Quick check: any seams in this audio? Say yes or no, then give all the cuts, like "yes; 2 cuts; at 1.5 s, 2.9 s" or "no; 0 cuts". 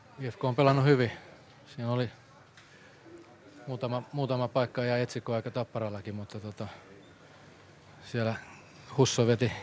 no; 0 cuts